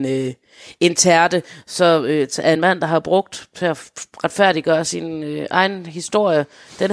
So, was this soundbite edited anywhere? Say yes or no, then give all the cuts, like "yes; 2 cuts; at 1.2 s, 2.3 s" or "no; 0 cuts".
no; 0 cuts